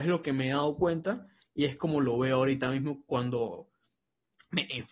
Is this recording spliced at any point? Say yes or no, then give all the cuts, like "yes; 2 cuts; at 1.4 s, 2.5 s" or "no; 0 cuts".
no; 0 cuts